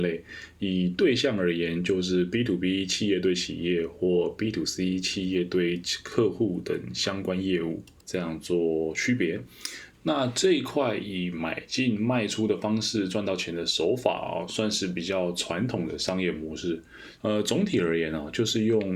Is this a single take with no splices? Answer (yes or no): no